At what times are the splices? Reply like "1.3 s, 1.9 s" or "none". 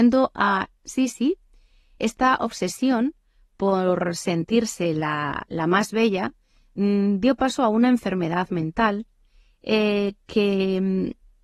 2.0 s

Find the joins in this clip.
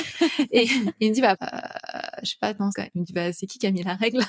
1.4 s, 2.7 s

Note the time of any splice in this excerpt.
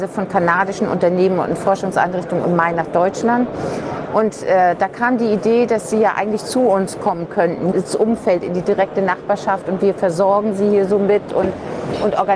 7.7 s

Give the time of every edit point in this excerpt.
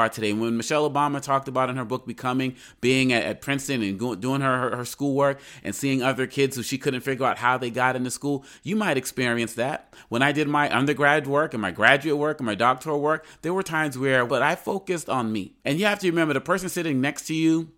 14.3 s, 15.6 s

